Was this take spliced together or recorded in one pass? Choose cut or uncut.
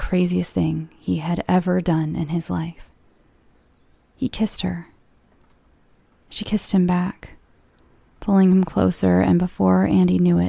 uncut